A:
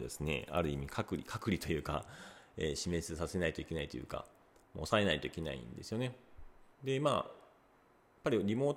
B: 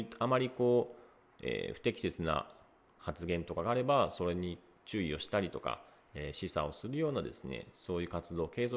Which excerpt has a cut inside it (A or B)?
A